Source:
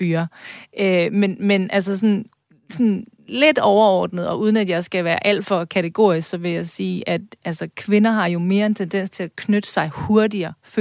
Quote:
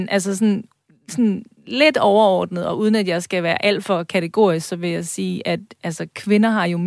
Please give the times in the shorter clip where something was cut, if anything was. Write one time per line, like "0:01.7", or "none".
none